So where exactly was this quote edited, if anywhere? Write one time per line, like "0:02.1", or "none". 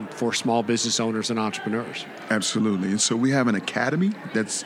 none

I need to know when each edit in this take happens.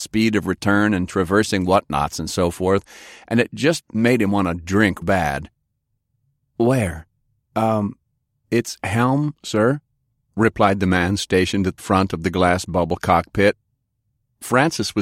0:05.0
0:07.4
0:11.8

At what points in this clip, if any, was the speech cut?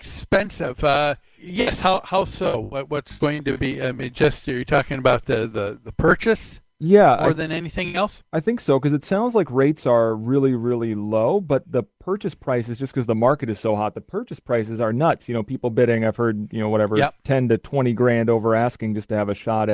0:01.4

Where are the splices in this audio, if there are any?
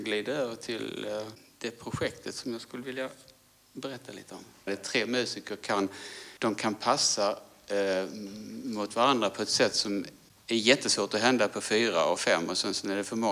0:04.7
0:06.4

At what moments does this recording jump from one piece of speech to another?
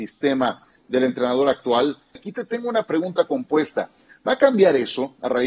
0:02.2

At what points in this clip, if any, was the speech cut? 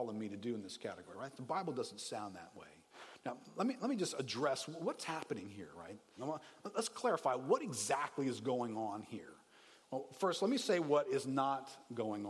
0:06.2

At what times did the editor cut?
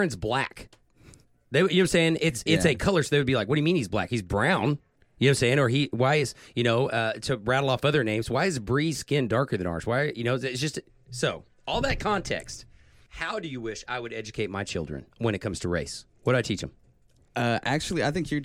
none

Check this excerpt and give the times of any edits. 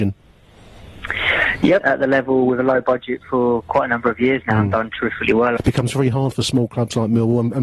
0:01.8
0:05.6

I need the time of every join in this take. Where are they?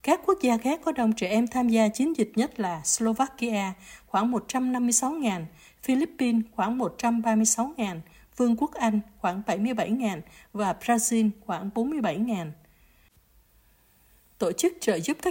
none

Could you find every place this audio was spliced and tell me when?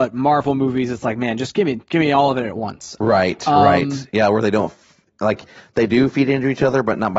0:03.0

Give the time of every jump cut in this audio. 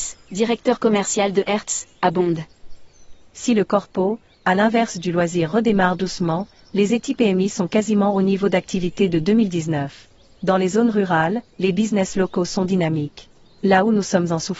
0:11.5

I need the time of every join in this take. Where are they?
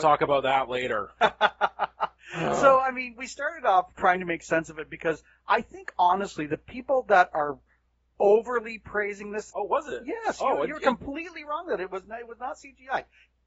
0:09.5

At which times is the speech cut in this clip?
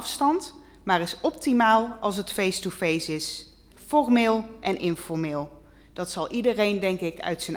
0:03.7

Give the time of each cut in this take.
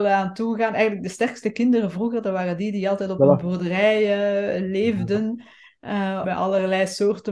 0:06.2

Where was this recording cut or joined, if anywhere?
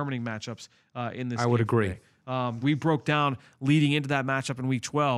0:02.6

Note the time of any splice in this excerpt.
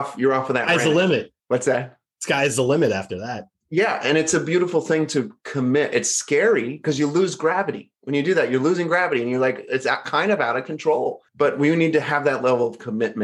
0:01.4
0:11.3

